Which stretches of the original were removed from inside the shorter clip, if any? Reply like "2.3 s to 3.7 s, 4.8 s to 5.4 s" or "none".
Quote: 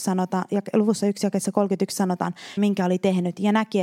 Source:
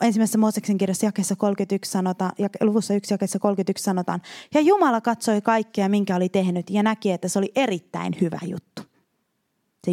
4.4 s to 5.9 s